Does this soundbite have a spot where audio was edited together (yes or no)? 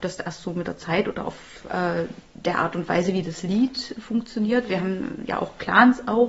no